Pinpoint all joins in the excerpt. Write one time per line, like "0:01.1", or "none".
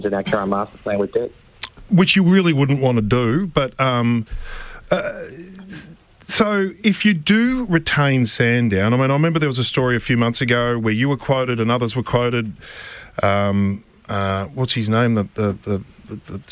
none